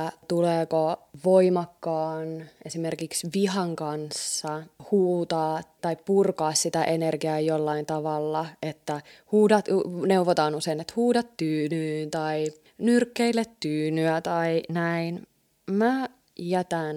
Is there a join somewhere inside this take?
yes; 1 cut; at 5.8 s

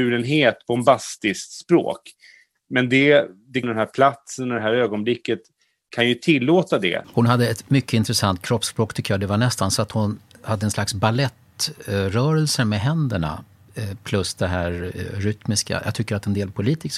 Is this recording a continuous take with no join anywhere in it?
no; 2 cuts; at 3.6 s, 7.0 s

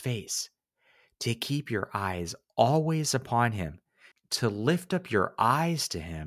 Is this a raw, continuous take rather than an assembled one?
no; 1 cut; at 4.1 s

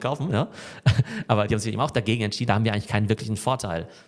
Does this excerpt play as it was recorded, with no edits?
no; 1 cut; at 2.5 s

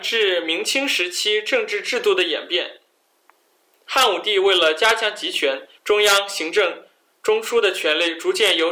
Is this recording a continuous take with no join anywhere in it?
no; 2 cuts; at 3.7 s, 5.8 s

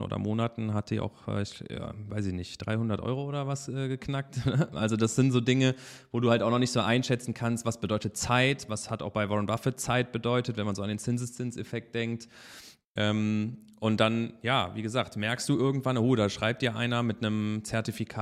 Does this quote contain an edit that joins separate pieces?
no; 0 cuts

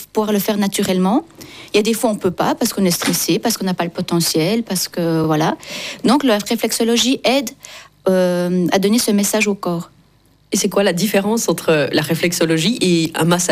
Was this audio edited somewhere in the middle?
no; 0 cuts

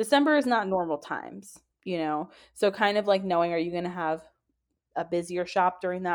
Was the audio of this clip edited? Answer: no; 0 cuts

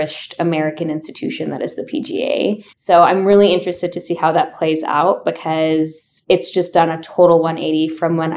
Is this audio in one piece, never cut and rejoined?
no; 2 cuts; at 2.7 s, 6.2 s

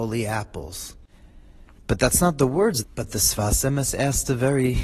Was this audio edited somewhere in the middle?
yes; 2 cuts; at 1.8 s, 2.8 s

